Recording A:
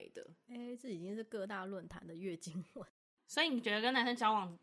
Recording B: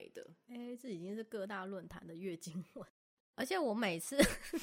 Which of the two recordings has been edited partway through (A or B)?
B